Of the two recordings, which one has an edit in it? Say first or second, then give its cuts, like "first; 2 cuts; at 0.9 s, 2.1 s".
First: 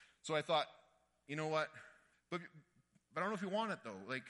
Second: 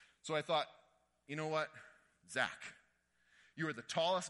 first; 1 cut; at 2.1 s